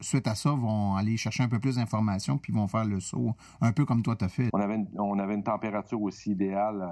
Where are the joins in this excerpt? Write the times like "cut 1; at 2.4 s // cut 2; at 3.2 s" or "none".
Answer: cut 1; at 4.5 s